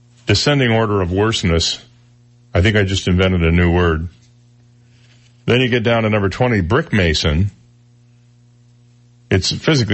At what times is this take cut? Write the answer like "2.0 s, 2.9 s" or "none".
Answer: none